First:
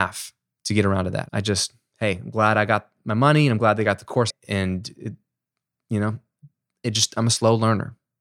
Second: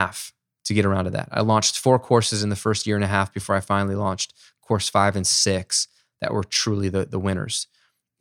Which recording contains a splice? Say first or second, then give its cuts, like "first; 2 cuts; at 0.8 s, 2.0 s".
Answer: first; 2 cuts; at 1.3 s, 4.3 s